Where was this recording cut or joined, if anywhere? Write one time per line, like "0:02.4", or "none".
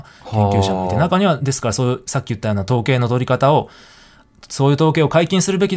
none